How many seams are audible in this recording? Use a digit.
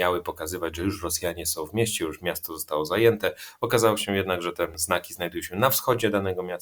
0